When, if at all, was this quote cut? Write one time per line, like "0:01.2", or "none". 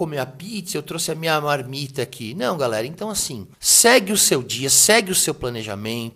0:03.5